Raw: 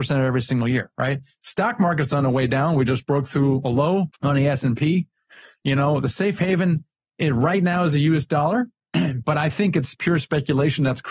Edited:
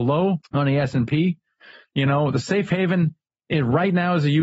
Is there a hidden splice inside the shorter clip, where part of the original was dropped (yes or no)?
no